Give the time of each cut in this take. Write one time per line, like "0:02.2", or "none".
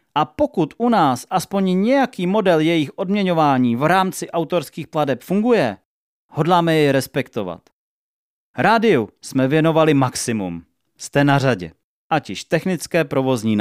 0:11.9